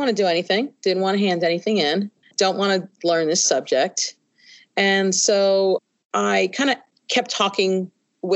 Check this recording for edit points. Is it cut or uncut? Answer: cut